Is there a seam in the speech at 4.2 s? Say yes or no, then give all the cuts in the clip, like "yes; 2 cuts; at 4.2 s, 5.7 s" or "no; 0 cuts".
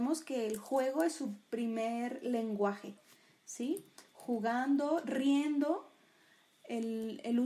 no; 0 cuts